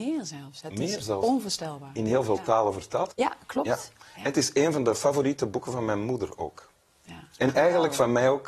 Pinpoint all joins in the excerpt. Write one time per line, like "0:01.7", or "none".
0:03.1